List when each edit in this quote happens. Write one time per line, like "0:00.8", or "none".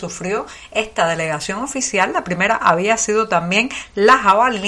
none